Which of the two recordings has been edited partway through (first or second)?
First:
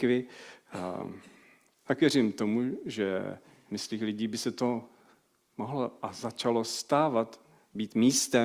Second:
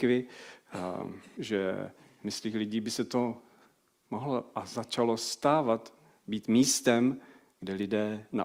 second